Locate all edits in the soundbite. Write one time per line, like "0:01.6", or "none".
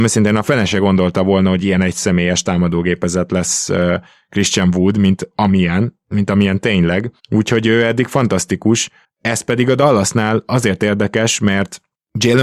0:07.2